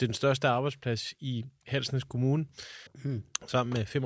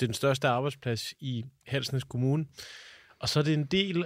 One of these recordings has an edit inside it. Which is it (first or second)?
first